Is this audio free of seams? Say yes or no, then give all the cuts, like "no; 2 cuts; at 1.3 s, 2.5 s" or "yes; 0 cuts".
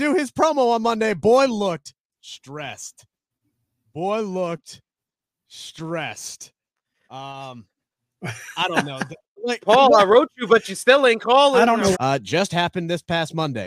no; 1 cut; at 11.9 s